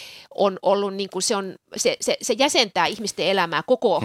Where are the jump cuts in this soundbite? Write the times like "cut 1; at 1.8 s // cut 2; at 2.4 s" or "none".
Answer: none